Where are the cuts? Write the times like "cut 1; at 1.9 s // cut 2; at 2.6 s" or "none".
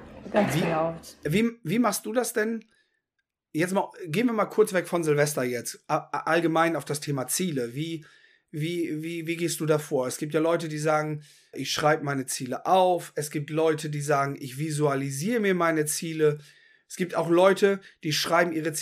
cut 1; at 11.5 s